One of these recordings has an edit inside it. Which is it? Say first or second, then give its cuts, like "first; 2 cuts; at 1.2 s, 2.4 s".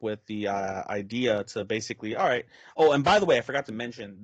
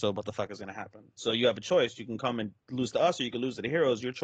second; 1 cut; at 1.2 s